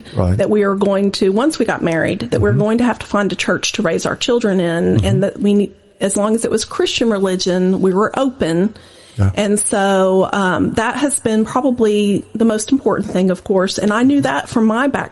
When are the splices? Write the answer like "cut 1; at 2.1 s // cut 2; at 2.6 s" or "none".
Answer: none

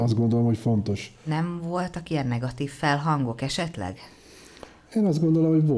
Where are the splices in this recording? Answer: none

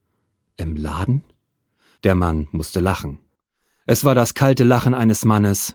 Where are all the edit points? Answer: cut 1; at 2.0 s

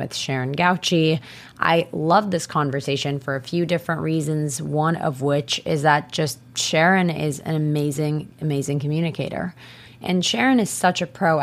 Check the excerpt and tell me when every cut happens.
cut 1; at 9.9 s

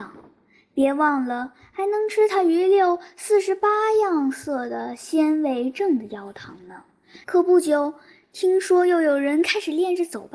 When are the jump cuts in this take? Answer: cut 1; at 7.2 s

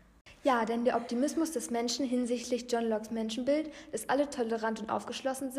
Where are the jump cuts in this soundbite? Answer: none

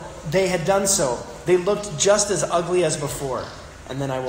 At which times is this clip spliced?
none

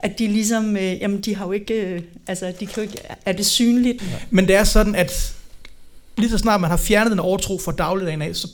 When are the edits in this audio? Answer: cut 1; at 4.0 s

